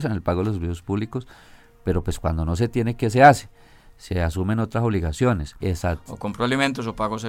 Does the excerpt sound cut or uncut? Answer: cut